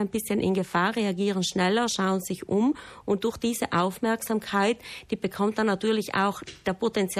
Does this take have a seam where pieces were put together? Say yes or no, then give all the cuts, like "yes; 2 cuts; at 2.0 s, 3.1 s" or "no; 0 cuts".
no; 0 cuts